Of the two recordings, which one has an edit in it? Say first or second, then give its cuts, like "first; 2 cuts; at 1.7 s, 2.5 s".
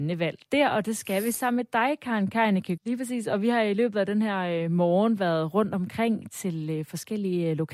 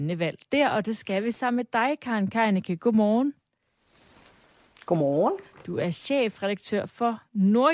first; 1 cut; at 2.8 s